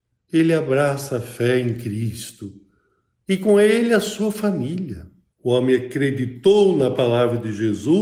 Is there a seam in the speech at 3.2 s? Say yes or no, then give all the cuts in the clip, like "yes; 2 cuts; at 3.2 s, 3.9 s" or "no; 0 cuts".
no; 1 cut; at 5.3 s